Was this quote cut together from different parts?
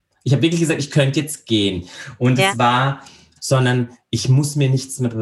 yes; 1 cut; at 3.4 s

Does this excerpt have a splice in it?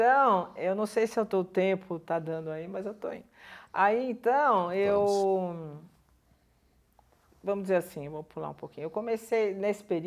no; 0 cuts

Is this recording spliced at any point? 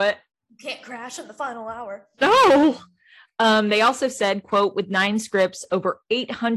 no; 0 cuts

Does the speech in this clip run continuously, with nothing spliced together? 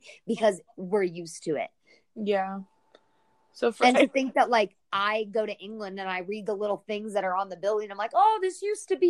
yes; 0 cuts

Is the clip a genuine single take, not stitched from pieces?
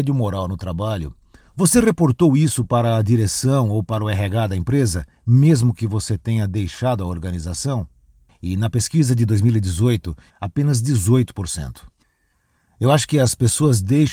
no; 2 cuts; at 8.3 s, 10.3 s

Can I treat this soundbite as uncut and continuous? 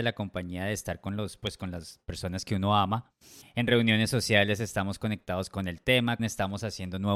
no; 2 cuts; at 3.4 s, 6.2 s

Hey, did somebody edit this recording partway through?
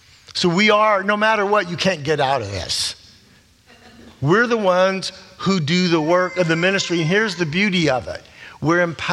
no; 0 cuts

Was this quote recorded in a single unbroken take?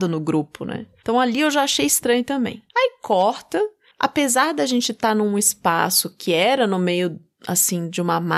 yes; 0 cuts

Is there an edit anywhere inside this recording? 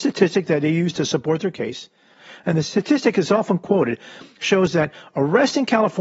no; 0 cuts

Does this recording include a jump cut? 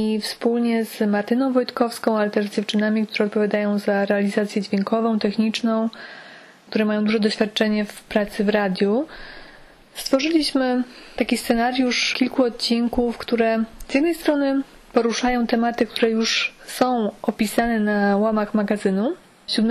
no; 0 cuts

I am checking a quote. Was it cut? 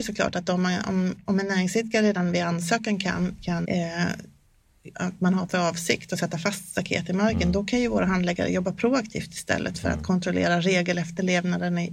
yes; 2 cuts; at 3.6 s, 4.9 s

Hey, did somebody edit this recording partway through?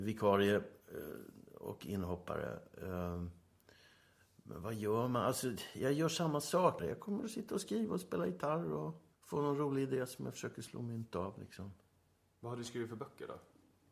yes; 2 cuts; at 6.8 s, 9.1 s

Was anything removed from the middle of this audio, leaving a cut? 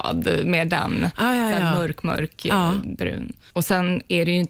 yes; 1 cut; at 3.5 s

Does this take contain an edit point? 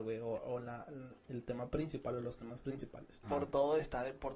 yes; 1 cut; at 3.2 s

